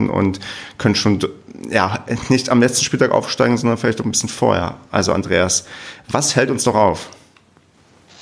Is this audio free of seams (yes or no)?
yes